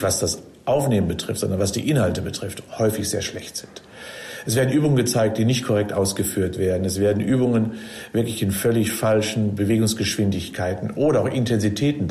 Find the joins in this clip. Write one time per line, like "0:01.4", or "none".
none